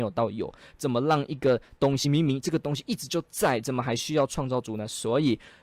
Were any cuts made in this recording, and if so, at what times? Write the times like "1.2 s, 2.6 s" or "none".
none